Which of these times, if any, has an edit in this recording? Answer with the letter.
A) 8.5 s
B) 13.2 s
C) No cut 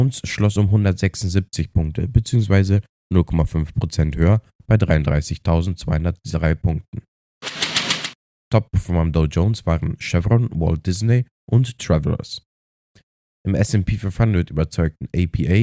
A